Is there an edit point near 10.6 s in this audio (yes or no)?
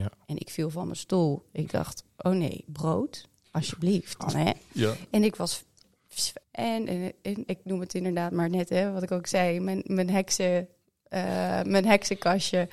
no